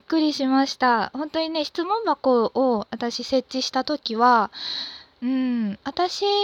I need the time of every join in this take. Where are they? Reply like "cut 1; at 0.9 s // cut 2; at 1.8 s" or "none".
none